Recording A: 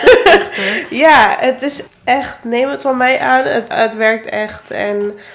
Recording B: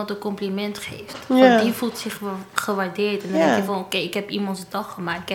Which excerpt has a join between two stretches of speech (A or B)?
A